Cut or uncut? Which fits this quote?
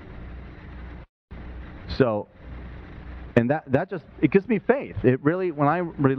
uncut